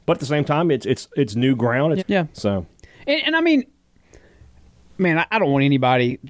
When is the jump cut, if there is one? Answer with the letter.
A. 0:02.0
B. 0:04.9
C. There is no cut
A